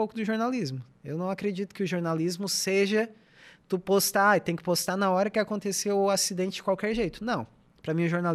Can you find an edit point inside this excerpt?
no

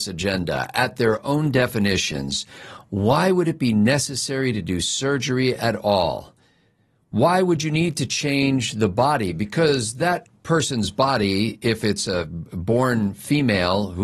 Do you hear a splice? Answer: no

